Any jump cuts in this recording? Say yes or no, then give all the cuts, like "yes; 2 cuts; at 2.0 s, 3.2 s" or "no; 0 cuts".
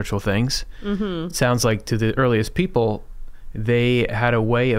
no; 0 cuts